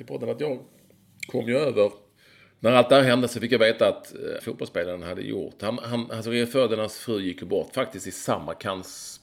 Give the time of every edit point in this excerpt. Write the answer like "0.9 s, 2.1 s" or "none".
4.4 s